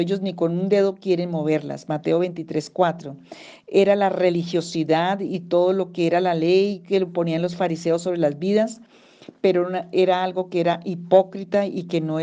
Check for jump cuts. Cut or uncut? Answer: uncut